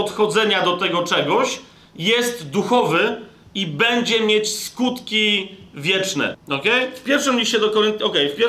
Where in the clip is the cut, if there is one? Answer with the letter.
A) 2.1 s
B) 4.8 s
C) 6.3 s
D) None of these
C